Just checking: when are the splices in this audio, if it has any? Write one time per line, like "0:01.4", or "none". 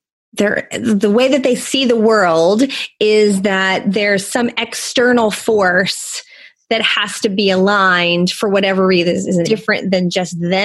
0:09.4